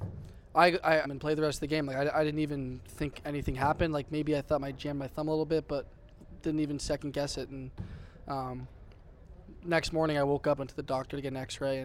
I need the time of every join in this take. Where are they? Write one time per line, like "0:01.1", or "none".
0:01.0
0:10.6